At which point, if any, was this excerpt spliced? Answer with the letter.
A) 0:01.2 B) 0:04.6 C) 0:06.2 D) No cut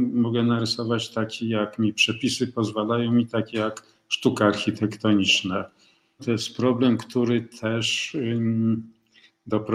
C